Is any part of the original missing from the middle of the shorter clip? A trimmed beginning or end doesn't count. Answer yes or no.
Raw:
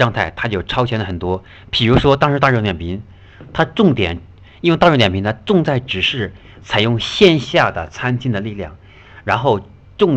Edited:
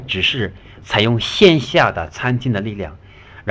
no